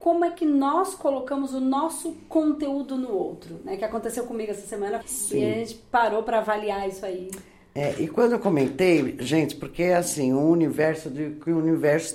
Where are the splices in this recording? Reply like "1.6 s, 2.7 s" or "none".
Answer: 5.0 s